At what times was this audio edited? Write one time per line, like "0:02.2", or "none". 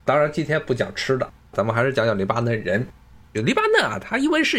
0:03.3